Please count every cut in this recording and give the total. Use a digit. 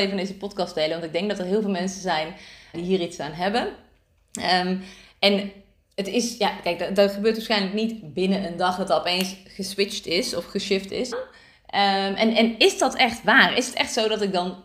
2